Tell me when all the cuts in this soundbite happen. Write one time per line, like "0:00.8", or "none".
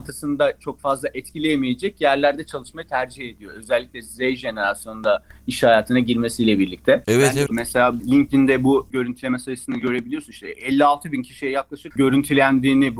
0:07.5